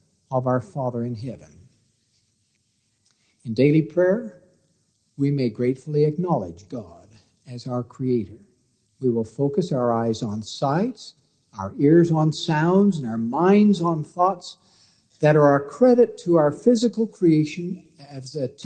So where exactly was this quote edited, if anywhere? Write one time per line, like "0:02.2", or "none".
0:08.9